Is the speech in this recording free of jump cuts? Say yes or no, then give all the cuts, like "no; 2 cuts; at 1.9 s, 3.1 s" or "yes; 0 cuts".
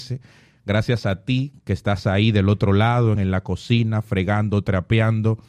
no; 1 cut; at 3.2 s